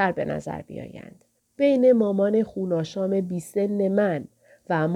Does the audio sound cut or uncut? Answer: cut